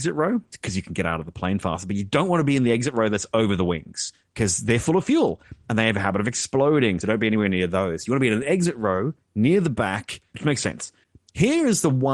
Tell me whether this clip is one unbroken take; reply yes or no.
yes